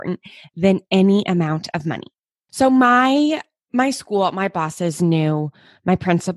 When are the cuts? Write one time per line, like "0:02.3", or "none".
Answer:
none

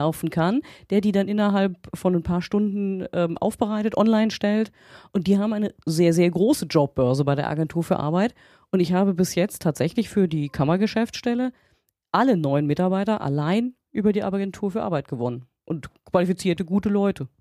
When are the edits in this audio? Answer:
none

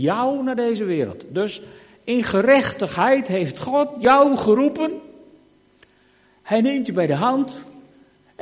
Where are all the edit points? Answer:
none

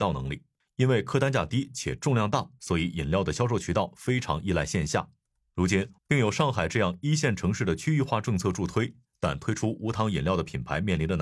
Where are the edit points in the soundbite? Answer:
0:06.0

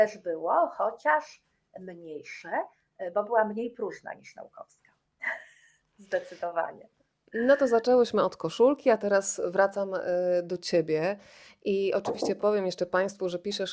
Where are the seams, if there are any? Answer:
none

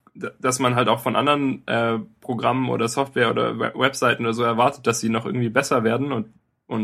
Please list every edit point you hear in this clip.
none

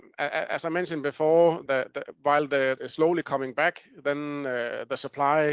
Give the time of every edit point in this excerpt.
0:01.7
0:02.8

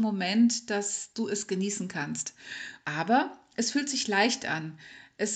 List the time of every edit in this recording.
0:02.8

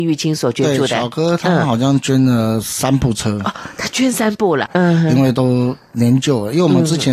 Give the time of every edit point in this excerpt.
0:04.7

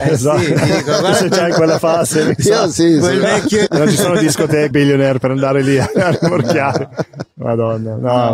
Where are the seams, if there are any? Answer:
0:03.7
0:04.7

